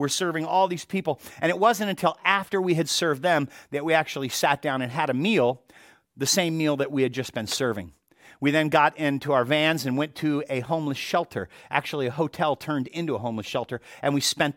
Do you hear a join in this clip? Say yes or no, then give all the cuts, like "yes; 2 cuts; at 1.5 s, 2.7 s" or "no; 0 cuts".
no; 0 cuts